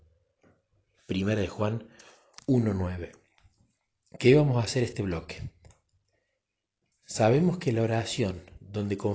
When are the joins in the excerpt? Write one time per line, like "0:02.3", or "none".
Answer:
0:01.0